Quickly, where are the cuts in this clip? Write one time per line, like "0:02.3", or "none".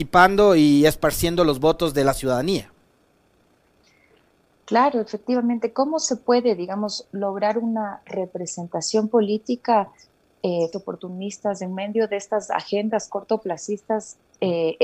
0:10.7